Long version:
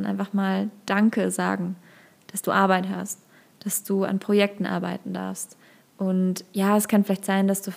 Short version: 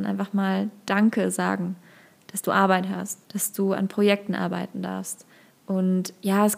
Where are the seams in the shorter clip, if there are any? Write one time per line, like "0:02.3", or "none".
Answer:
0:03.2